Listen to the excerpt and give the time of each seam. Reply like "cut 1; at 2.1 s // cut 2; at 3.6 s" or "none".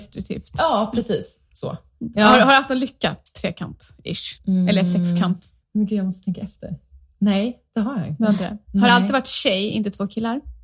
none